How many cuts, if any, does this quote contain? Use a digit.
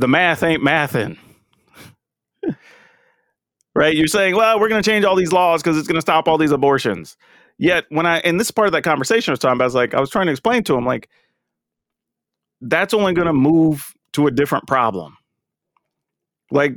0